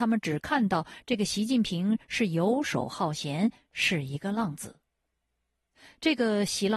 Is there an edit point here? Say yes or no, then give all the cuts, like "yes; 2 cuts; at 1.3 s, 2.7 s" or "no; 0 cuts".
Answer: no; 0 cuts